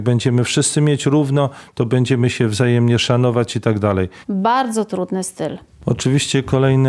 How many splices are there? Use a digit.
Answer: 1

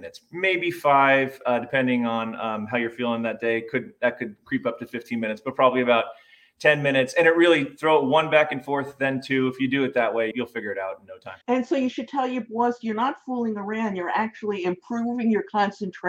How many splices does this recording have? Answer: 2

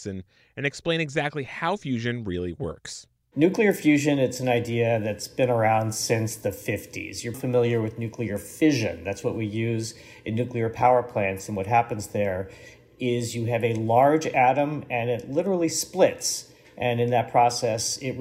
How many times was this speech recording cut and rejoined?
1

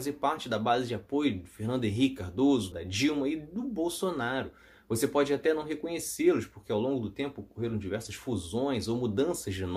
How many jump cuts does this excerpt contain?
1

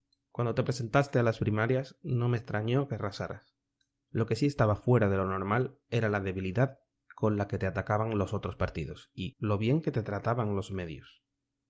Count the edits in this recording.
2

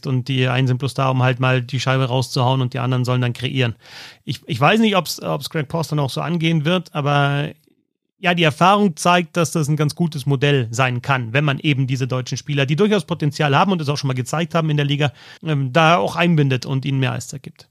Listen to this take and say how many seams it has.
1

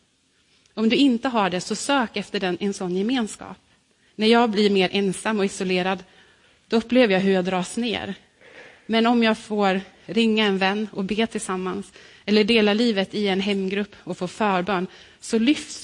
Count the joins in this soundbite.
1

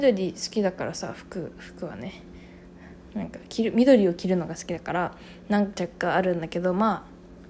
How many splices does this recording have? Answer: 0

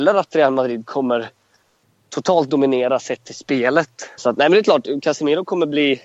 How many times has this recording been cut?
1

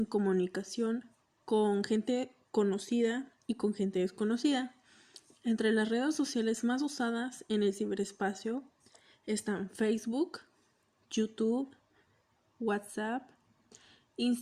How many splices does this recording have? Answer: 0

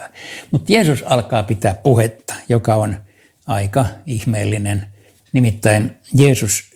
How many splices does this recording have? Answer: 1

